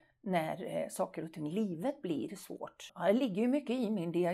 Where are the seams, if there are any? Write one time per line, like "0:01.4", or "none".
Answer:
0:02.9